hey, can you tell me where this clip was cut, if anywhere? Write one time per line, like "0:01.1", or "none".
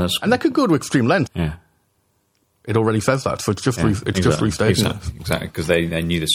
0:01.3